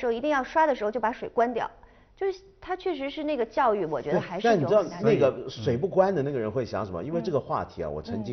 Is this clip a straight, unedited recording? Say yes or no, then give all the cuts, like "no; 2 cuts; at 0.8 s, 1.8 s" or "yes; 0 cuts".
yes; 0 cuts